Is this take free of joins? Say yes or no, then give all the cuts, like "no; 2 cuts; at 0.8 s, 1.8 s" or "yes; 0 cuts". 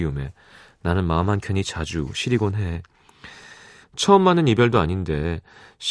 no; 1 cut; at 3.8 s